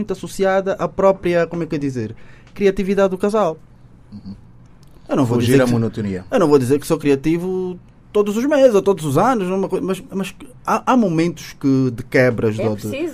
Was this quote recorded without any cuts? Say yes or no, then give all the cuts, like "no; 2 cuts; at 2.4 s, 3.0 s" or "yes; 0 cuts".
yes; 0 cuts